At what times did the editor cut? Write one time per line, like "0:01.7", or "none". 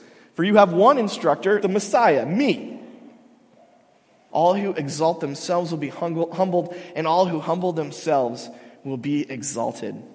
0:01.6
0:04.3

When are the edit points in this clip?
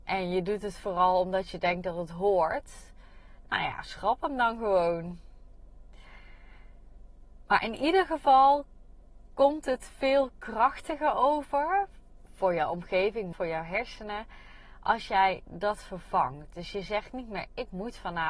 0:13.3

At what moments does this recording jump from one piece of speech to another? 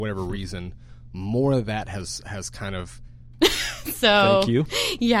0:03.4

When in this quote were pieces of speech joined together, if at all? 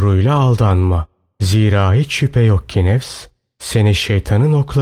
0:01.3

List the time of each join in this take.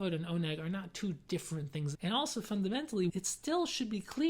0:01.9
0:03.1

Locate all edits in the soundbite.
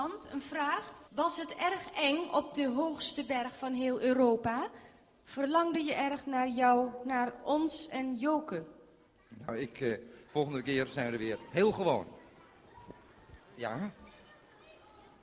0:01.1
0:10.3
0:13.4

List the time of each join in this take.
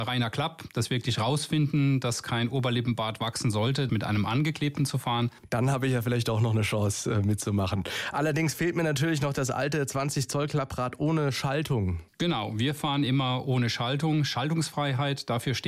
0:03.9

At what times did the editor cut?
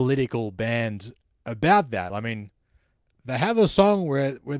none

